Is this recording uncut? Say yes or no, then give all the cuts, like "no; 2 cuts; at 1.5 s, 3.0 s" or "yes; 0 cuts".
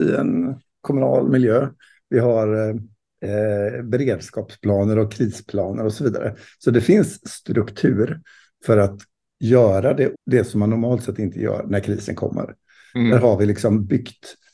no; 1 cut; at 10.1 s